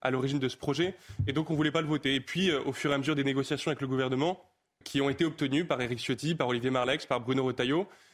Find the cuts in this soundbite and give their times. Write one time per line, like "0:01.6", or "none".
0:04.8